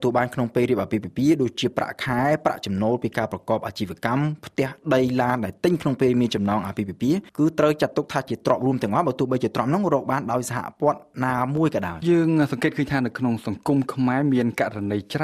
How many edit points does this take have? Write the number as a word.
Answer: two